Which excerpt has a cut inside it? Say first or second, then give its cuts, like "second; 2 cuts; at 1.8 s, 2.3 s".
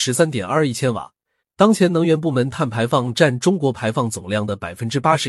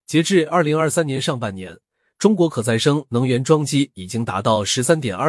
first; 1 cut; at 1.4 s